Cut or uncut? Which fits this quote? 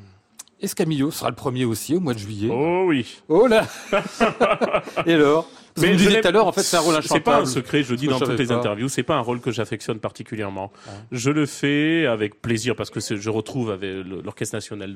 uncut